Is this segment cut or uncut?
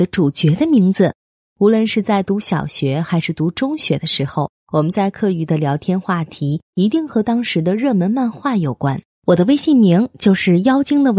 cut